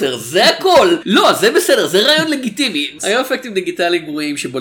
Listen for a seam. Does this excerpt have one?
yes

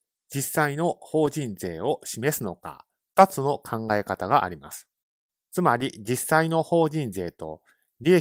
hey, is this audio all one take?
no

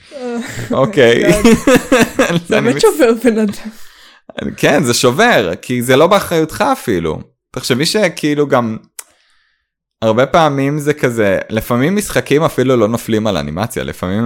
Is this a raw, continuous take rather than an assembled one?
yes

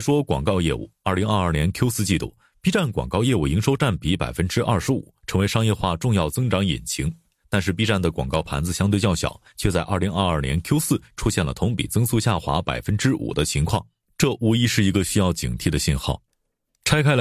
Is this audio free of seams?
no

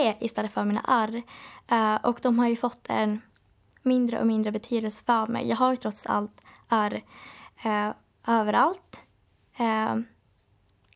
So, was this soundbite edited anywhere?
no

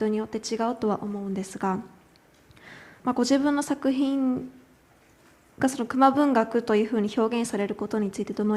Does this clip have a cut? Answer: yes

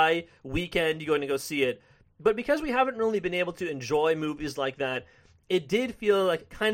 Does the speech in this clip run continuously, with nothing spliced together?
yes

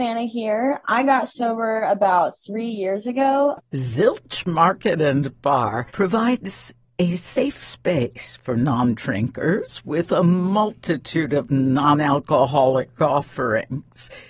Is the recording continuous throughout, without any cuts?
no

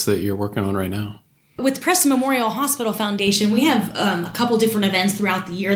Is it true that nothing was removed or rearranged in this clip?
yes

